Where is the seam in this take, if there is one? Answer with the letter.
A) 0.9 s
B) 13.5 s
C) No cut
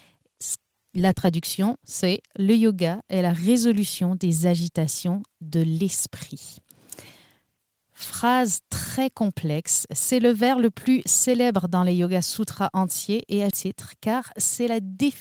B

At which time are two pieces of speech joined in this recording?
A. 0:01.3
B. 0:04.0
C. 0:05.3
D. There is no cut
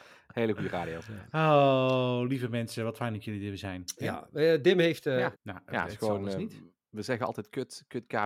C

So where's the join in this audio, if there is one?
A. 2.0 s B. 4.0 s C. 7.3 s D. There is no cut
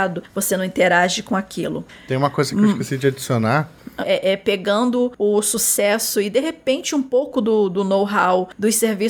B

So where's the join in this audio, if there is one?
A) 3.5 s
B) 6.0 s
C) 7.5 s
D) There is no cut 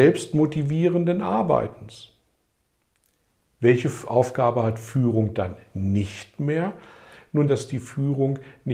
C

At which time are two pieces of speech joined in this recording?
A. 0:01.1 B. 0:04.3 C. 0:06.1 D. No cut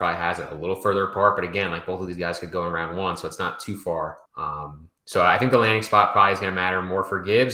B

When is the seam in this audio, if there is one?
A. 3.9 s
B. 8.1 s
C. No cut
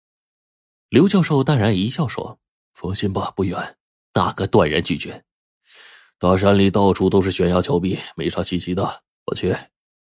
A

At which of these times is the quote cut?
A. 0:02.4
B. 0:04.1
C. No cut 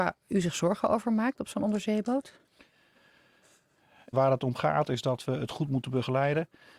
B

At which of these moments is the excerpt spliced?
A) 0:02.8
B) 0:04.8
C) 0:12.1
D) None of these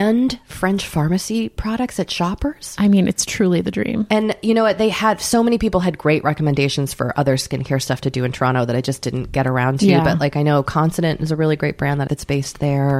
C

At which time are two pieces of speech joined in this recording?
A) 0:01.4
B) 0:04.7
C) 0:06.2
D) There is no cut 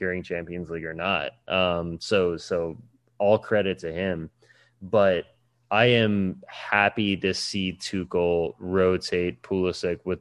D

